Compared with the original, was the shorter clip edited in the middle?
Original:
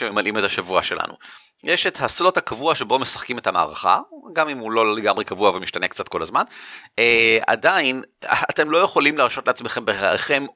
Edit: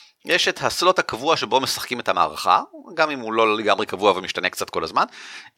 no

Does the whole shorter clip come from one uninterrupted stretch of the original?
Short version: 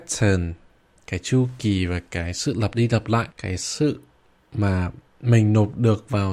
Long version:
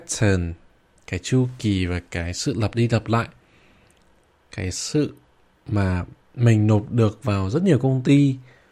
no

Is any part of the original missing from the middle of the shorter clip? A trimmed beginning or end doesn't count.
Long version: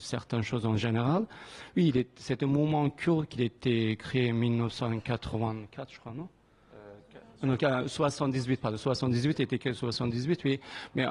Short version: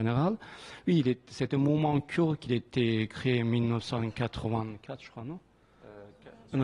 no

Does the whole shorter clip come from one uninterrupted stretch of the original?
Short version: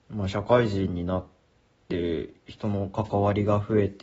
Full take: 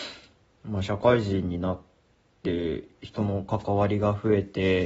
yes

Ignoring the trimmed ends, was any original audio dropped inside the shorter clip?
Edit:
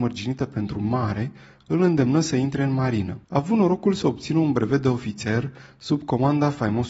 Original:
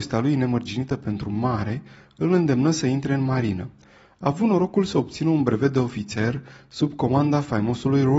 yes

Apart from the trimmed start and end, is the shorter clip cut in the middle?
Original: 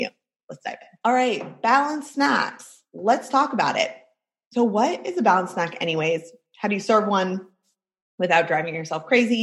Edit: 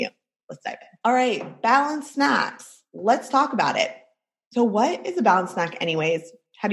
no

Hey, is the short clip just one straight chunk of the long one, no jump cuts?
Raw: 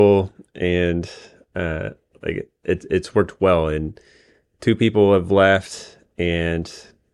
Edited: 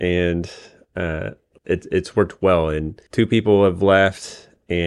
no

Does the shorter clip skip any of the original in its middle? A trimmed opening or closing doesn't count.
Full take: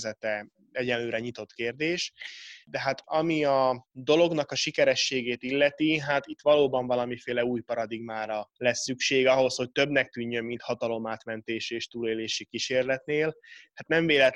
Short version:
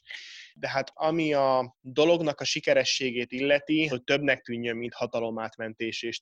yes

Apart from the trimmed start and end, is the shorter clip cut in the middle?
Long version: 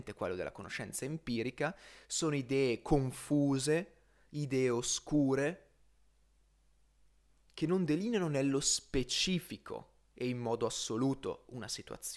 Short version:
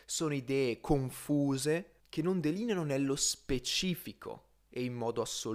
yes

